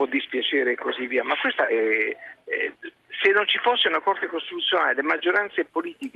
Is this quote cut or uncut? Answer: uncut